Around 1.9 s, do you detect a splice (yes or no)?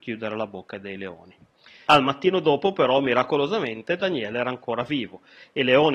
yes